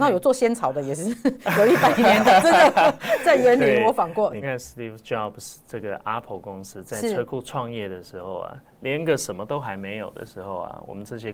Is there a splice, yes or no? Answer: yes